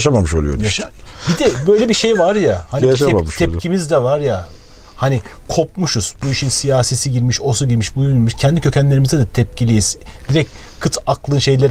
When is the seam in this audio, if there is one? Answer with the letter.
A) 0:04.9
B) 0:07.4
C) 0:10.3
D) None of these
D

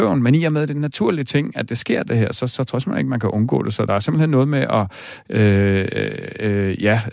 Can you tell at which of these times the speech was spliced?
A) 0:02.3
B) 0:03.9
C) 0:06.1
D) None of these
D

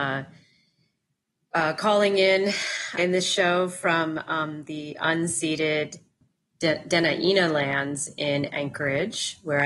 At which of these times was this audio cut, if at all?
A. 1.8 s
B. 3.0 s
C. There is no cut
B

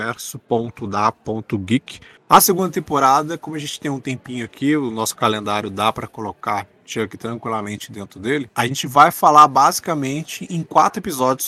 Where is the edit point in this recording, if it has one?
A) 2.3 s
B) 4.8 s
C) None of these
A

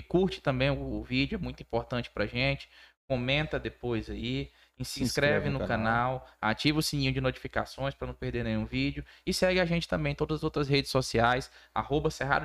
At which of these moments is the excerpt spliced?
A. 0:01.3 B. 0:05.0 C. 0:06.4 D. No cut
D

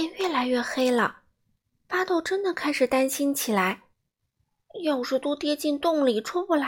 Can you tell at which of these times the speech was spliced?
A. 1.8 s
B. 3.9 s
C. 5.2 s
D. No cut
C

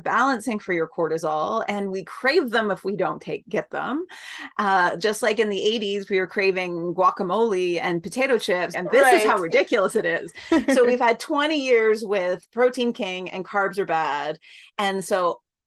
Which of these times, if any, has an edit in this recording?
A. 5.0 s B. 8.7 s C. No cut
B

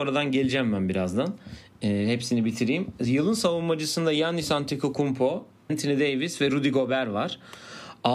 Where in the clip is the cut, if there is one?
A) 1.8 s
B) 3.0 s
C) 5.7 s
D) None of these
C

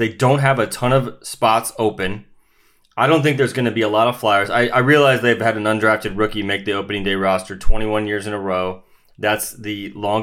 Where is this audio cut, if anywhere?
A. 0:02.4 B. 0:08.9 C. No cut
C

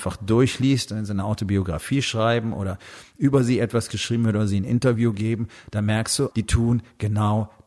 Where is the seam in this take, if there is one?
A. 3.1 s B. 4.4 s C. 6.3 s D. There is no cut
C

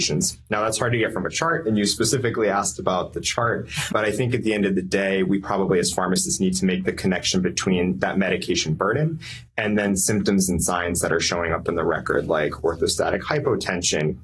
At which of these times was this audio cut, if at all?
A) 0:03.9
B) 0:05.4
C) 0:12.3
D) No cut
A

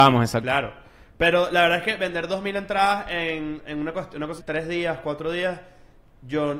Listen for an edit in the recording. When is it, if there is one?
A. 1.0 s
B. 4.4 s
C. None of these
B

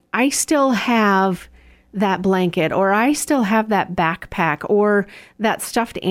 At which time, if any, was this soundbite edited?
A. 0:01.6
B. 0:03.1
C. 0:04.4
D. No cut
D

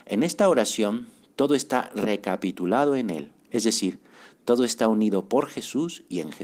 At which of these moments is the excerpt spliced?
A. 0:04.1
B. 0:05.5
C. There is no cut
C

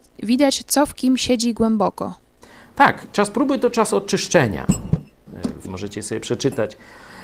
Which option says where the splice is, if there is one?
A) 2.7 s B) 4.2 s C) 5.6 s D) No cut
C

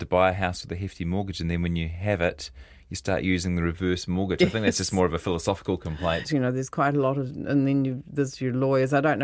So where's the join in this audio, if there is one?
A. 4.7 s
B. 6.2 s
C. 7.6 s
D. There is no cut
B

